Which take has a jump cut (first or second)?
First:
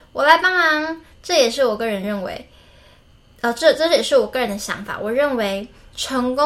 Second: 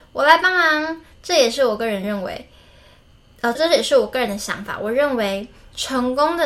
second